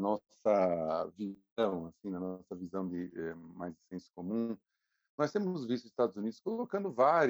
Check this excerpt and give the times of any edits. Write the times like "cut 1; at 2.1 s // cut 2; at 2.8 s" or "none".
none